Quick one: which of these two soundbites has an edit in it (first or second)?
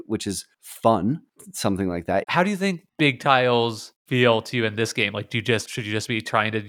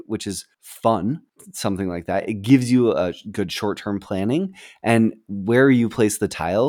first